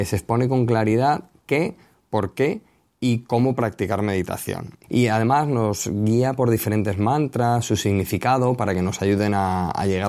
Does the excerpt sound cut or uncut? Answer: cut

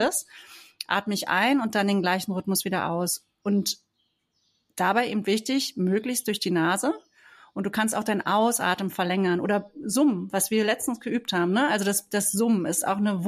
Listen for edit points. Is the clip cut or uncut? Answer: uncut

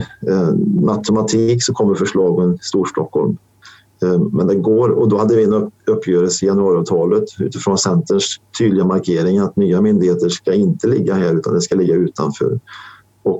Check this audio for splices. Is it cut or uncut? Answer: uncut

